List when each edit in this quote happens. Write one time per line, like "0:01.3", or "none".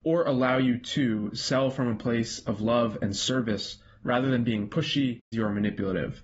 0:05.3